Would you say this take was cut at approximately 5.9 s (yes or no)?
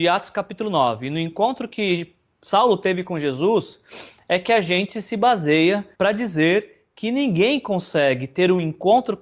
yes